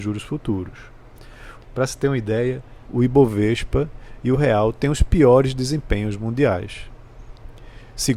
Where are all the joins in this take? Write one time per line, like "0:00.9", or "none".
0:01.6
0:02.8